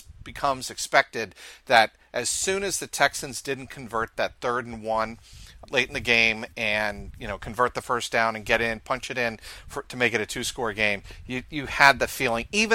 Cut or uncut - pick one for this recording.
cut